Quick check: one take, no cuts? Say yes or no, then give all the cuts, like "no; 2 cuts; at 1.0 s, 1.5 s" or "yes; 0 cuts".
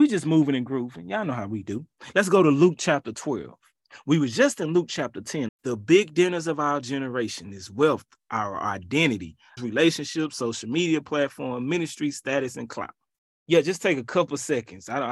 no; 3 cuts; at 5.5 s, 9.6 s, 13.3 s